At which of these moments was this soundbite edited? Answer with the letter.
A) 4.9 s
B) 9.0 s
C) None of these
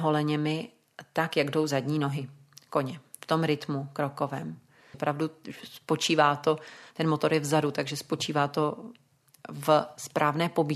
A